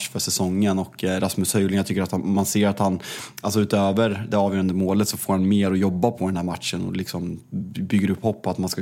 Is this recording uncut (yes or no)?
yes